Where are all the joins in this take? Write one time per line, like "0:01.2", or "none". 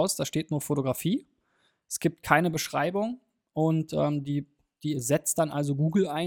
none